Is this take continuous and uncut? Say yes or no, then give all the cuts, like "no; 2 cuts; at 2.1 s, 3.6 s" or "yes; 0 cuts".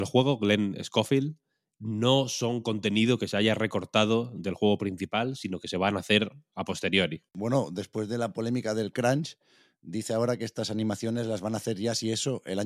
yes; 0 cuts